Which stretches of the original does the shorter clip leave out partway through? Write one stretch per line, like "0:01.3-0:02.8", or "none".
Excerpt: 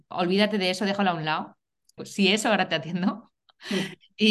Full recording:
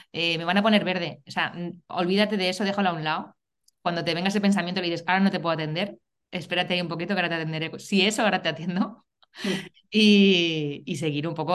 0:03.8-0:07.7